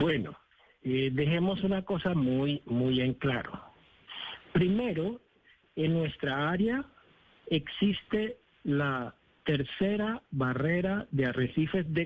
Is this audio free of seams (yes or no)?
yes